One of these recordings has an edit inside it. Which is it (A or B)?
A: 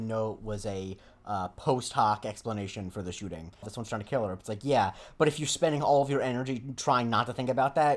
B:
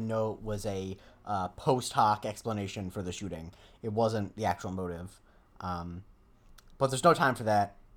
A